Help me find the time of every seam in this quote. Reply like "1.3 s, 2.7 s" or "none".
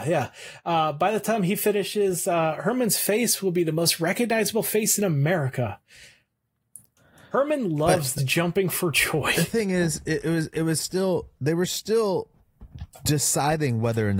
8.2 s